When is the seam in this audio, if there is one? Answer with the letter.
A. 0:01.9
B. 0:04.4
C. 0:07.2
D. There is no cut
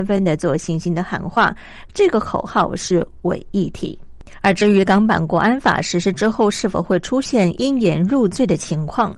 A